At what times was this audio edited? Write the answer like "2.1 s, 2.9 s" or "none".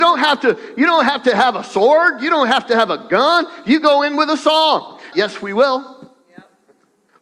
5.1 s